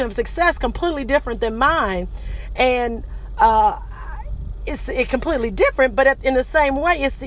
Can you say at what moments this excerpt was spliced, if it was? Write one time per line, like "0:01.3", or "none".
none